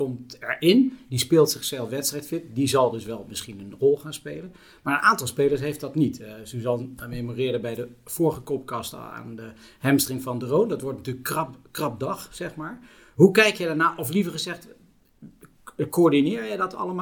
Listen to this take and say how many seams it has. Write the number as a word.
zero